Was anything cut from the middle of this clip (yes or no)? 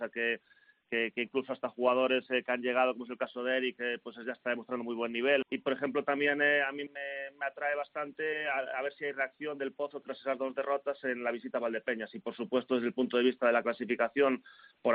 yes